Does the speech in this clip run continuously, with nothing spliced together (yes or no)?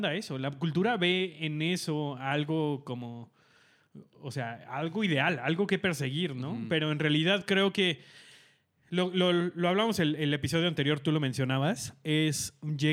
yes